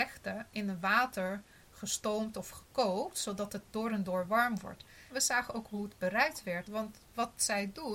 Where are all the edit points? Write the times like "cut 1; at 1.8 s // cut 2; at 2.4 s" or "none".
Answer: cut 1; at 5.1 s // cut 2; at 6.6 s